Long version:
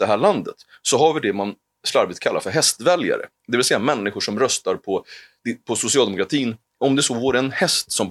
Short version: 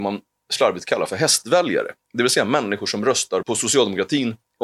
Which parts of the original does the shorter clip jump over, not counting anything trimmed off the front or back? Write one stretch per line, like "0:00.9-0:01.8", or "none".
0:04.8-0:05.6

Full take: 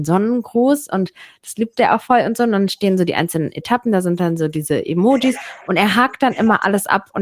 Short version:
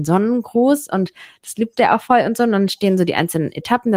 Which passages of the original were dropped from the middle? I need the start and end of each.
none

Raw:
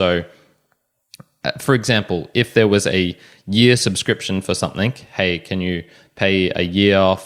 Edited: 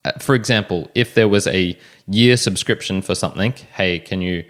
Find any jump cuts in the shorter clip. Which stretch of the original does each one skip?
none

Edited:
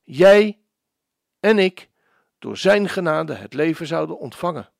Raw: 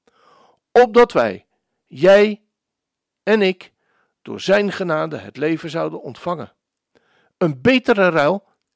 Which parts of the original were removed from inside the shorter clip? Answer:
none

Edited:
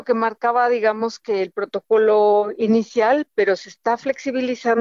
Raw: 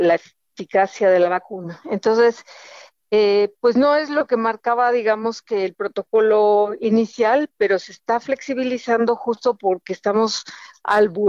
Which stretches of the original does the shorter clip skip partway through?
none

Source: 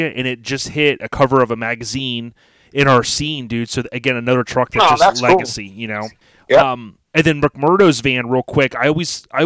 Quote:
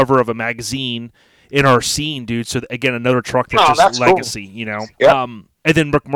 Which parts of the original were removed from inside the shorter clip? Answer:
0:06.2-0:06.4

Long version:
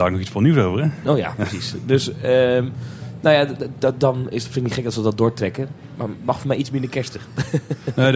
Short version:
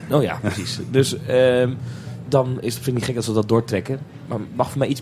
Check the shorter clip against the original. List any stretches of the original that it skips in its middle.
0:03.2-0:04.0

